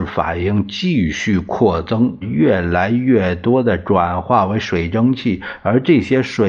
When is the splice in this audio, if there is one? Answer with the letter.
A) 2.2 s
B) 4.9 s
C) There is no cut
A